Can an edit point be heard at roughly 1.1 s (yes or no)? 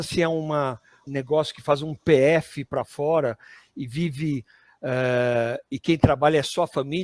yes